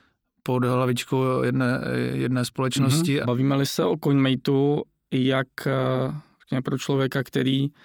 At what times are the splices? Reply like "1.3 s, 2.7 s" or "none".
3.2 s